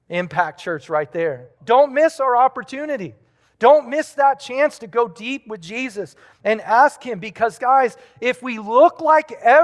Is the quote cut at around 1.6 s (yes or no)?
yes